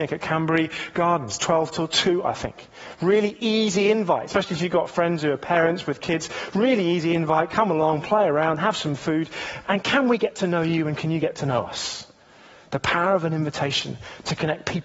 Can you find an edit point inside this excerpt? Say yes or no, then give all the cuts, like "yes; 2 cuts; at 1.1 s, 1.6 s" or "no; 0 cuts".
no; 0 cuts